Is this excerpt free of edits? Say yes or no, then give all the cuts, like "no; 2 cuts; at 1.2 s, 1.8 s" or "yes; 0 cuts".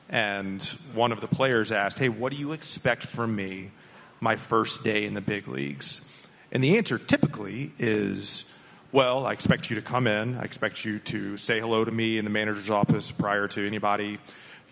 yes; 0 cuts